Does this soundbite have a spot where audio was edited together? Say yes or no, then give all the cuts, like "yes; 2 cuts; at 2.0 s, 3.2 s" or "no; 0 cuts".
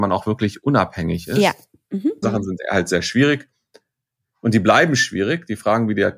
yes; 1 cut; at 2.2 s